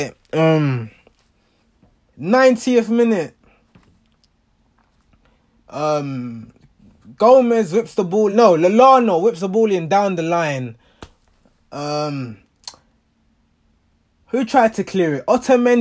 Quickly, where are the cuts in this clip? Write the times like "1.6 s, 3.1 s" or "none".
none

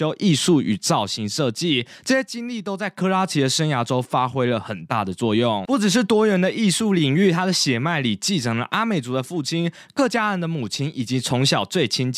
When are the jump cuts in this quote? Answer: none

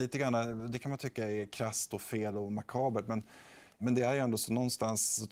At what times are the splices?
3.8 s

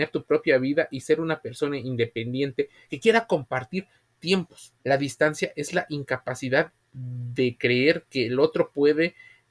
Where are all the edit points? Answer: 4.8 s

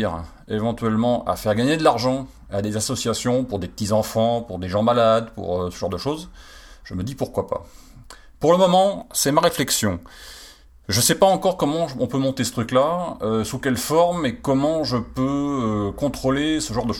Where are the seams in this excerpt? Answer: none

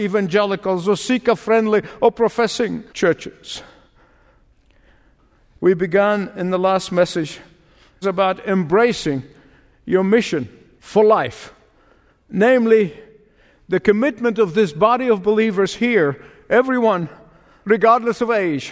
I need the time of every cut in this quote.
none

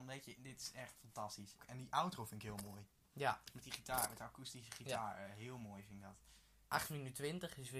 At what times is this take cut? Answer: 1.6 s

